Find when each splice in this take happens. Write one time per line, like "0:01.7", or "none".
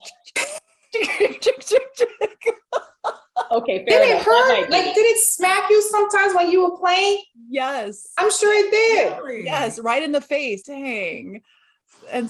0:10.6

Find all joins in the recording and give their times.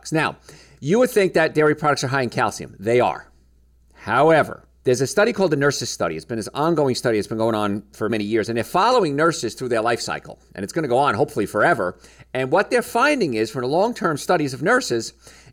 0:04.8
0:08.1

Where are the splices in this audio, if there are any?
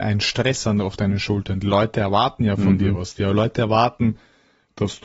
none

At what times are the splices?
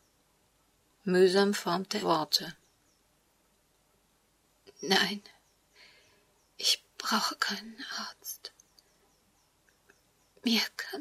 0:02.0

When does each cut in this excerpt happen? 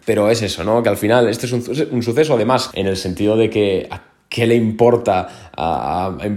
0:02.7

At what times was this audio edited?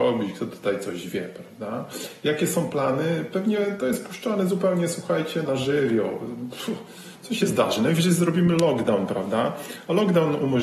0:05.4

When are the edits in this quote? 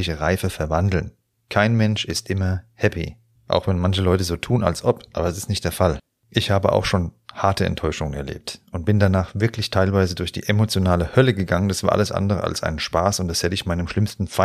0:01.4
0:03.4

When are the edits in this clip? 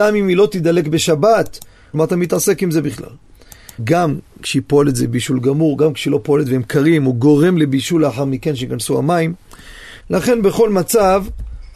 0:01.9
0:03.8
0:10.0

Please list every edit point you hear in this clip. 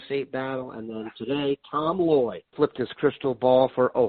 0:02.5

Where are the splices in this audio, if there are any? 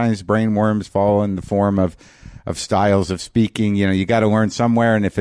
none

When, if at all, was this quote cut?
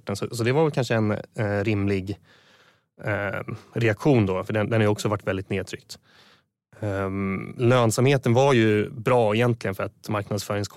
none

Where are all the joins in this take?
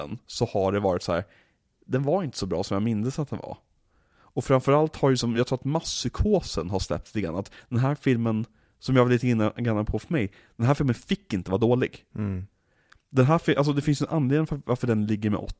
none

